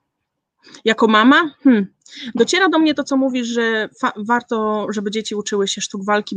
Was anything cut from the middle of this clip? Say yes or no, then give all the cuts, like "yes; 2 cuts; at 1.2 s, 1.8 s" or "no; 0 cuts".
no; 0 cuts